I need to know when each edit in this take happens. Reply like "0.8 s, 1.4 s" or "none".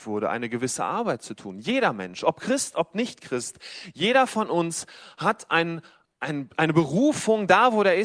none